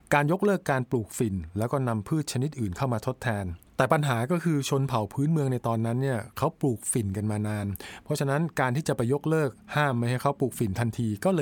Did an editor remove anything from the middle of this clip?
yes; 1 cut; at 3.7 s

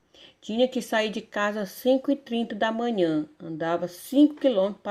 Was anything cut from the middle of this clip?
no; 0 cuts

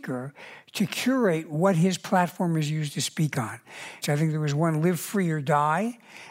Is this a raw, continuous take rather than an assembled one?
no; 1 cut; at 4.0 s

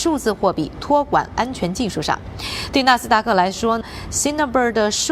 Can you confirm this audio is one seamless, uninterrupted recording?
yes; 0 cuts

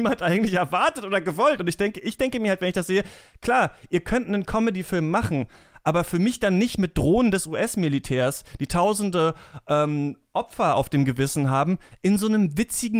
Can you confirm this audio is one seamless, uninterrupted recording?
yes; 0 cuts

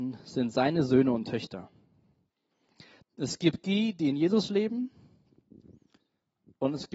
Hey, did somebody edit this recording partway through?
yes; 1 cut; at 3.0 s

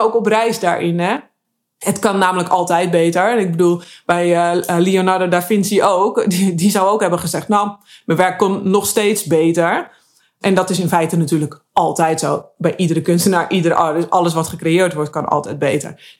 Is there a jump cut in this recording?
no; 0 cuts

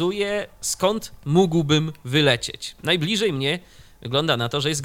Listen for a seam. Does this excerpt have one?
no; 0 cuts

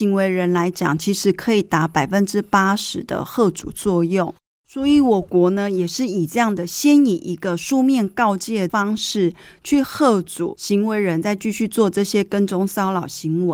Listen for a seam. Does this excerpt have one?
no; 0 cuts

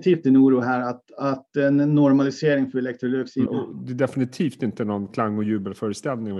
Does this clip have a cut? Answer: yes; 1 cut; at 3.5 s

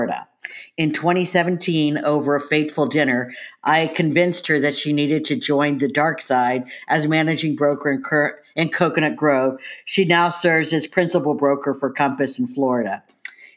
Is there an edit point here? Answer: no; 0 cuts

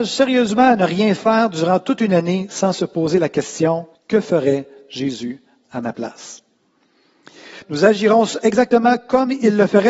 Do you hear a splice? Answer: yes; 2 cuts; at 3.9 s, 7.6 s

